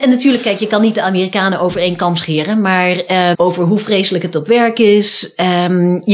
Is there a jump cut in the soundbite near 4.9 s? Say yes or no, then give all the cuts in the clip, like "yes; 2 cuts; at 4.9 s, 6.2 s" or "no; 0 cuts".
no; 1 cut; at 3.3 s